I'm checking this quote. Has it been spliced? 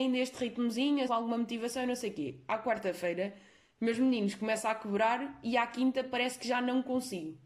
yes; 1 cut; at 1.1 s

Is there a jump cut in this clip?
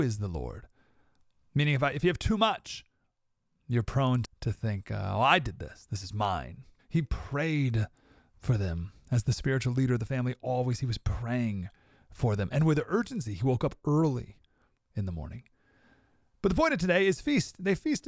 yes; 2 cuts; at 4.2 s, 6.8 s

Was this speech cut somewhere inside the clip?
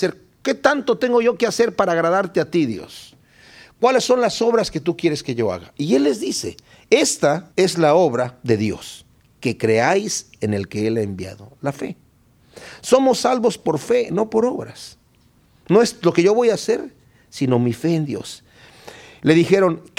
no; 0 cuts

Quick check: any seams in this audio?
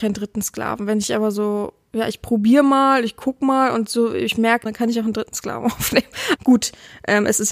yes; 2 cuts; at 4.7 s, 6.4 s

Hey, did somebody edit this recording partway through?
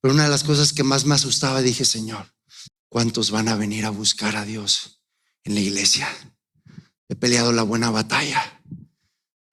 yes; 2 cuts; at 2.7 s, 7.0 s

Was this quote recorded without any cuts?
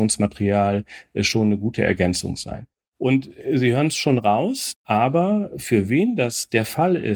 no; 1 cut; at 4.7 s

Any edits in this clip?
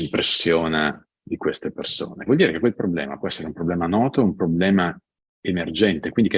yes; 1 cut; at 2.3 s

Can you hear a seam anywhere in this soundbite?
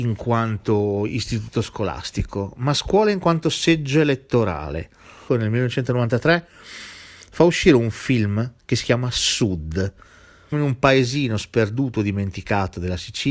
yes; 2 cuts; at 5.3 s, 10.5 s

